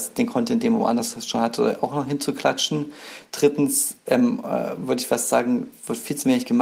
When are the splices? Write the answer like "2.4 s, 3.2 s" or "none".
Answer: none